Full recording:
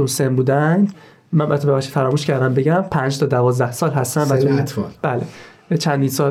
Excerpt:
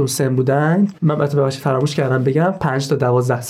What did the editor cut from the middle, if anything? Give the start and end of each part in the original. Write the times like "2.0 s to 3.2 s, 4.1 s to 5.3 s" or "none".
1.0 s to 1.3 s